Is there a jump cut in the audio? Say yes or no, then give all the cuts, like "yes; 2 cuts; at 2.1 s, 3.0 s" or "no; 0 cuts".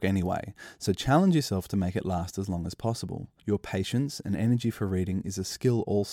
yes; 1 cut; at 3.4 s